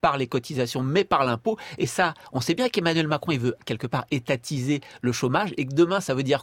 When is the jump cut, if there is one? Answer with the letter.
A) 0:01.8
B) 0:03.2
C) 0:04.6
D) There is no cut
D